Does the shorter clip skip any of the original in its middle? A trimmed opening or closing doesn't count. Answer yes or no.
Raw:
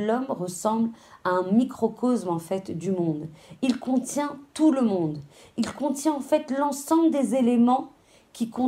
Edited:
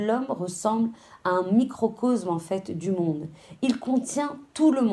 no